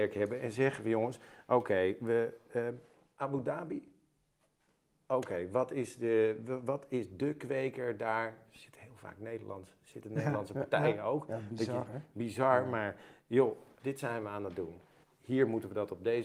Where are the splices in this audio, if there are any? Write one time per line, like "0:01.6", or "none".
0:13.8
0:15.0